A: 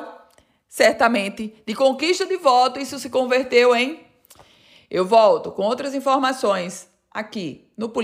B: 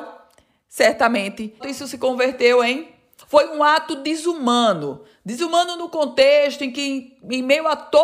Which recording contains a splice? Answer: B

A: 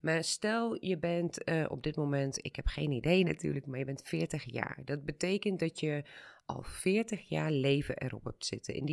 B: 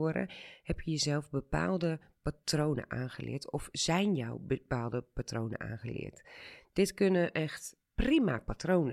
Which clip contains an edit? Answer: B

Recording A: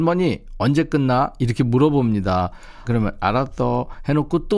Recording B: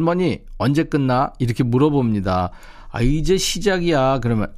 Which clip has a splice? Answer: A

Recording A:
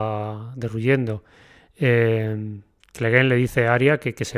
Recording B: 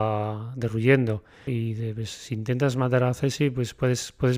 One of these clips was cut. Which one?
B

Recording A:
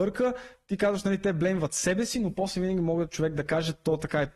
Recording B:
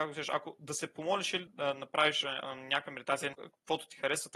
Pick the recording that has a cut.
B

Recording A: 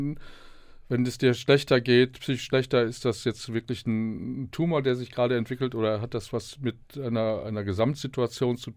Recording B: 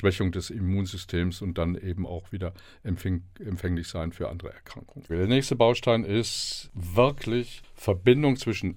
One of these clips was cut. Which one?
B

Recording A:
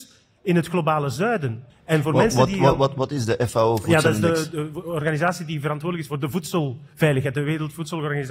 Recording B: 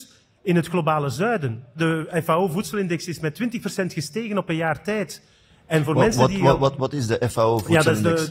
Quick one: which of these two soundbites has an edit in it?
A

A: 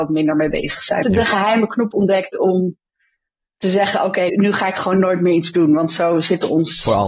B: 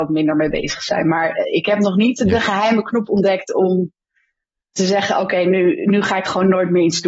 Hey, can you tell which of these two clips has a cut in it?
A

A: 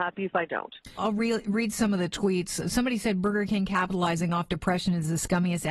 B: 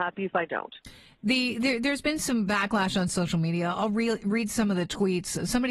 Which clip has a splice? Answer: A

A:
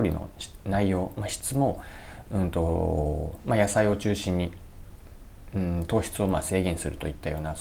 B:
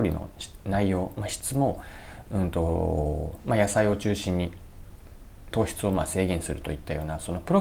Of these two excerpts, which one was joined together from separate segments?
B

